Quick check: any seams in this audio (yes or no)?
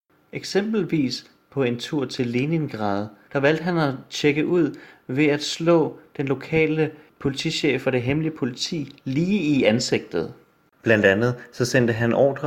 yes